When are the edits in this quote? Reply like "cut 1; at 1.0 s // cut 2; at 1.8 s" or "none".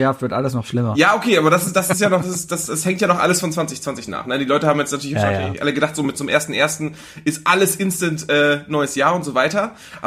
none